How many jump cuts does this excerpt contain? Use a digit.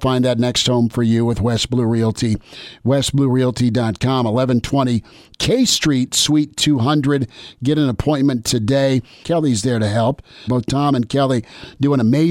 2